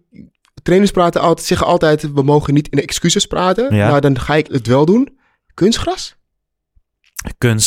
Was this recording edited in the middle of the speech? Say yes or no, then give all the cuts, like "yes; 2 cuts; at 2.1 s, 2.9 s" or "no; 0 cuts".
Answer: yes; 1 cut; at 4.5 s